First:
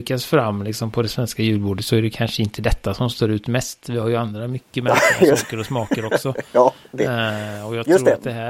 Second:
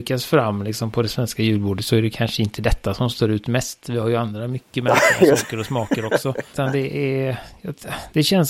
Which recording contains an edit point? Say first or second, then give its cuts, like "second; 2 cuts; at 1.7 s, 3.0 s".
second; 1 cut; at 6.5 s